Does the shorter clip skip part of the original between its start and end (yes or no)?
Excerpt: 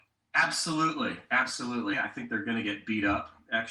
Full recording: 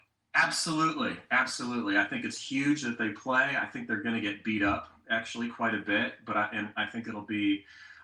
yes